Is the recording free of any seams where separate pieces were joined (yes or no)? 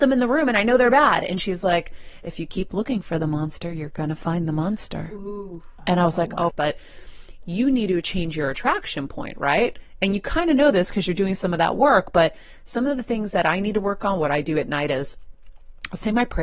no